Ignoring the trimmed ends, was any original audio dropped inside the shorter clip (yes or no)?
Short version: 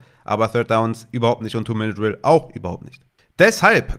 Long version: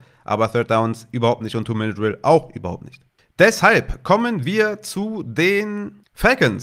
no